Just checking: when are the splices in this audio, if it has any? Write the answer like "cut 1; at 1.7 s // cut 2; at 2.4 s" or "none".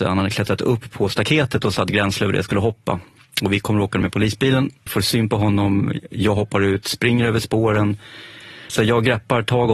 cut 1; at 4.9 s // cut 2; at 8.7 s